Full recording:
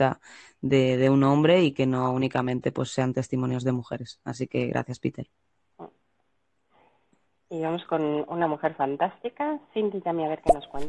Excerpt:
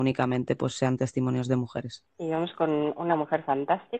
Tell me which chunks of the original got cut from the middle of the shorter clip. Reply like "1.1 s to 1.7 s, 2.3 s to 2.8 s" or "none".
4.2 s to 7.4 s